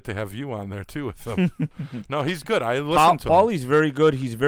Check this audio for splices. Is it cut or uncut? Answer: cut